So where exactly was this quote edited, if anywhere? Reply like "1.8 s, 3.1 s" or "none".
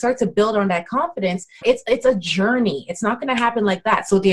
1.6 s